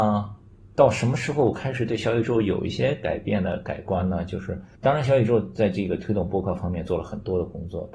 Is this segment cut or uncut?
cut